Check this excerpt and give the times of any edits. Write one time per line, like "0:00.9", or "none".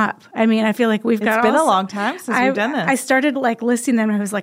none